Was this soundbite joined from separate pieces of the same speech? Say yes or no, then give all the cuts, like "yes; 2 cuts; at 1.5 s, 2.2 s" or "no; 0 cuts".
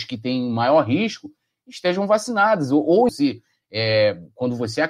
yes; 1 cut; at 3.1 s